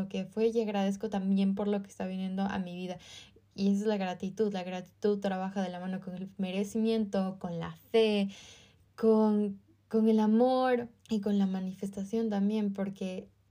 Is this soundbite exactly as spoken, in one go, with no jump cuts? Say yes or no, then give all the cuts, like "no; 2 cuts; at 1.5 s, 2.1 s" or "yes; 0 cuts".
no; 1 cut; at 11.0 s